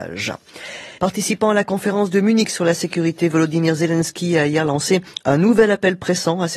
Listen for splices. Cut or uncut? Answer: cut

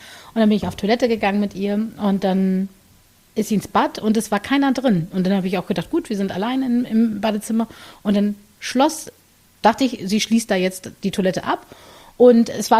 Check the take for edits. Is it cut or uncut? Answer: cut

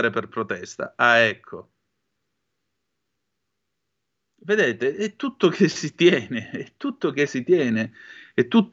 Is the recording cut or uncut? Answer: uncut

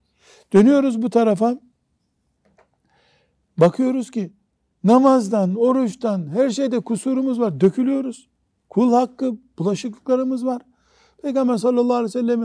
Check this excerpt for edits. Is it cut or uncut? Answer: uncut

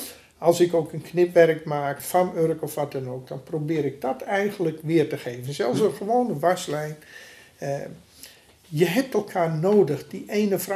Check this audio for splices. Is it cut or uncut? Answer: cut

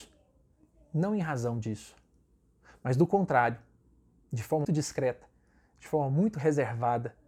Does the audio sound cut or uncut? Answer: cut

